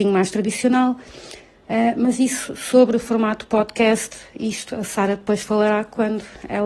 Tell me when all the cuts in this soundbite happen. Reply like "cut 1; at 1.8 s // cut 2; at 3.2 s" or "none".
none

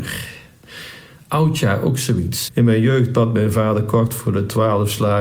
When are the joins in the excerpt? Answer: cut 1; at 2.5 s

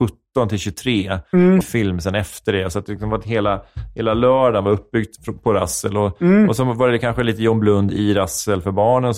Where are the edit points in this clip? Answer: cut 1; at 1.6 s

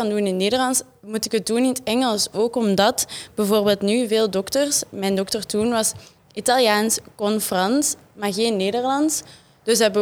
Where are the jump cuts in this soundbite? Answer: none

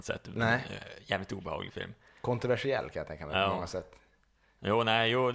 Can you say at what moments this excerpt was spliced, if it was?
none

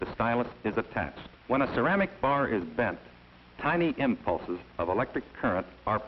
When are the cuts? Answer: cut 1; at 1.4 s

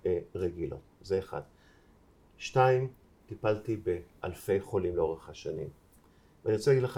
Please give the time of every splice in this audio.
cut 1; at 3.2 s

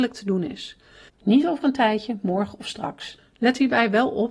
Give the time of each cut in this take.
cut 1; at 1.1 s // cut 2; at 3.2 s

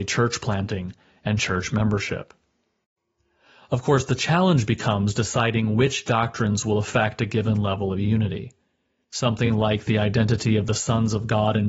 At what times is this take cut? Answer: none

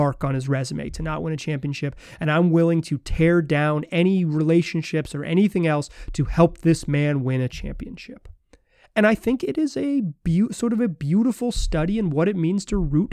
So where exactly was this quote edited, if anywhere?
none

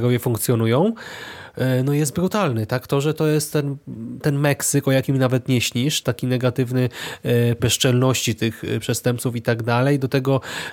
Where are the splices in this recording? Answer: cut 1; at 6.0 s // cut 2; at 7.6 s

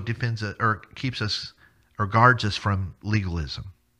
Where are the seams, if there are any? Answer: none

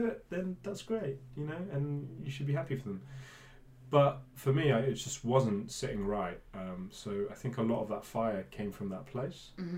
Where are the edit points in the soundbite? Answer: none

